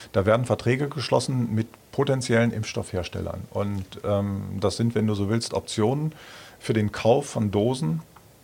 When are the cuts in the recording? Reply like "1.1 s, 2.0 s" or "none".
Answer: none